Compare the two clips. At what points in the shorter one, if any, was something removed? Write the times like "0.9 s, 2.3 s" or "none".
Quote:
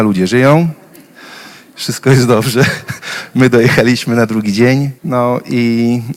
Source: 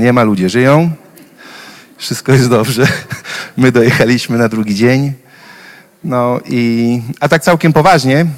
5.0 s